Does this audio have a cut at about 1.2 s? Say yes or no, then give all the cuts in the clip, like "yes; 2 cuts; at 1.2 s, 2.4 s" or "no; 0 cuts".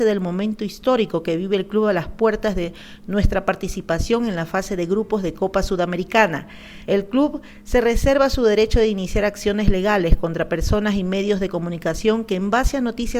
no; 1 cut; at 6.9 s